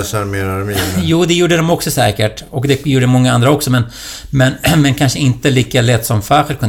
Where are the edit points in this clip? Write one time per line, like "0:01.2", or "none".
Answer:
none